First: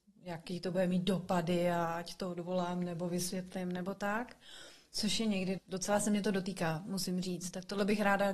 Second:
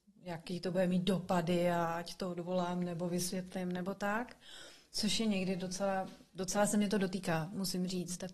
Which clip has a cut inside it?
first; 1 cut; at 5.6 s

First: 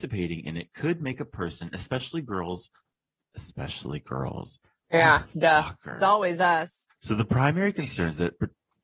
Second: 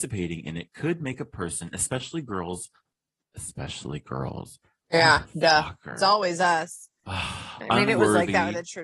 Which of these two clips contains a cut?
first; 1 cut; at 6.9 s

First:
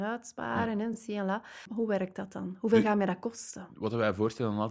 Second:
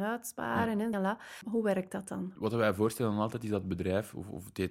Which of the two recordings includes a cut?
second; 2 cuts; at 0.9 s, 2.4 s

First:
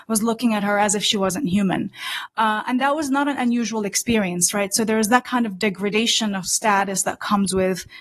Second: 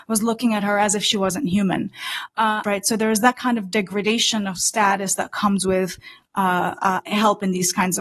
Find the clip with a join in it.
second; 2 cuts; at 2.6 s, 7.0 s

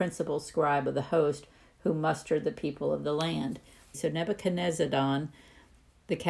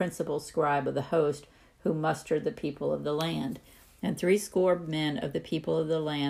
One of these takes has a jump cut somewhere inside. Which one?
first; 1 cut; at 3.9 s

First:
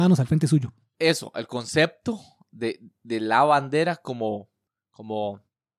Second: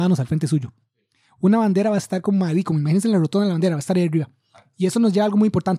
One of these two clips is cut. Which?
first; 1 cut; at 0.9 s

